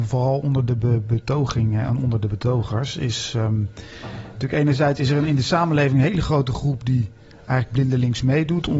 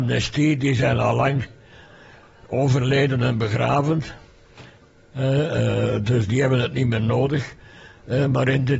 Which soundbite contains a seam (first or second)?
second